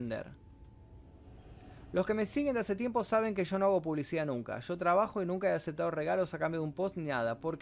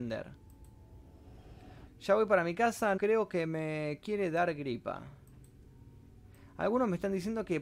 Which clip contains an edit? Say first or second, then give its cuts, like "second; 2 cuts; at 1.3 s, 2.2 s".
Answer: second; 2 cuts; at 1.9 s, 3.0 s